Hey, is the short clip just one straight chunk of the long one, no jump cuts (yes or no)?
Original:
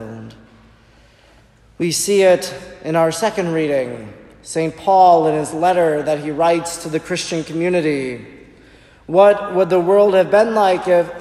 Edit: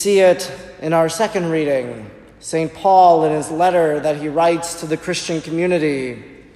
yes